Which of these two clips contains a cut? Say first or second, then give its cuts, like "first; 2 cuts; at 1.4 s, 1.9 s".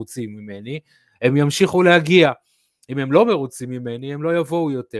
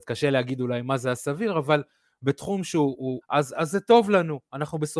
second; 1 cut; at 3.2 s